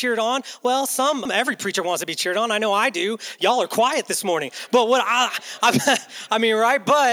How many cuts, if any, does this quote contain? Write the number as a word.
one